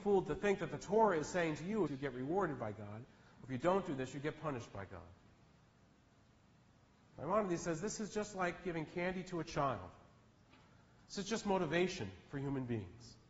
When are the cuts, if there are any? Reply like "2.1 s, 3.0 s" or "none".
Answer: 1.9 s